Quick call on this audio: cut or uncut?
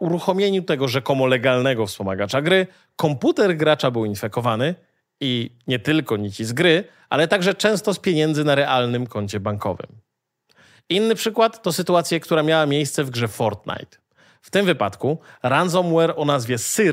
uncut